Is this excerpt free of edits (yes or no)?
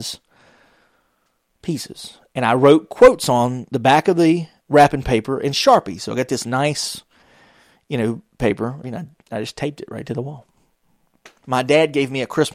no